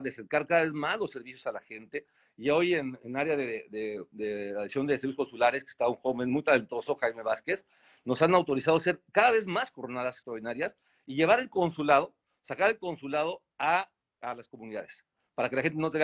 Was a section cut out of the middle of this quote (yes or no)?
no